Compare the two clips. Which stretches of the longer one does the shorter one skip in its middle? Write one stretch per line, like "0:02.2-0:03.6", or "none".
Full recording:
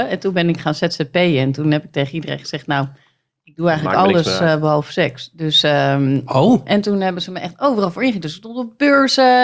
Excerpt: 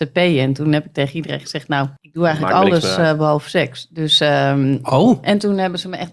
0:03.0-0:03.4